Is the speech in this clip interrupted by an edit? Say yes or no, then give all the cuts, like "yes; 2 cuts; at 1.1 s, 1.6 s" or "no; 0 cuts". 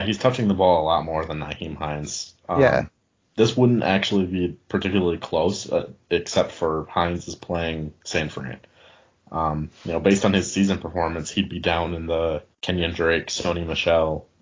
yes; 1 cut; at 12.5 s